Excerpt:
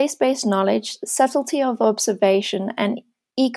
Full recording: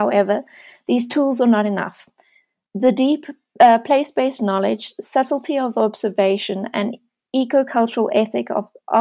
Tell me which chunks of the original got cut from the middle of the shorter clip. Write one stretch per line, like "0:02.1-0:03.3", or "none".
none